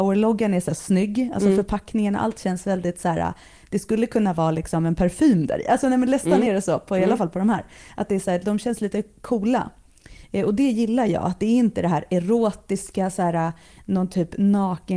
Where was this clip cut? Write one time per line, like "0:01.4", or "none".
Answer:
none